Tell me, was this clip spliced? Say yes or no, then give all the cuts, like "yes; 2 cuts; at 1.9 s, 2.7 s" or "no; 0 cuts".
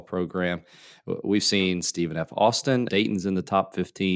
yes; 1 cut; at 2.9 s